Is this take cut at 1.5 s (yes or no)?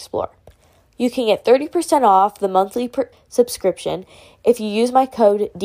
no